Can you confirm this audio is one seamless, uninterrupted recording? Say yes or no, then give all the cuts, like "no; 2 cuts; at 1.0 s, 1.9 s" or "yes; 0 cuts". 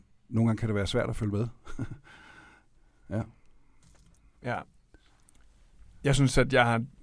yes; 0 cuts